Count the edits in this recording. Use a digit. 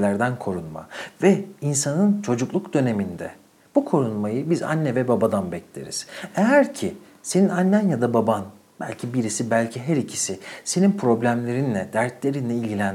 0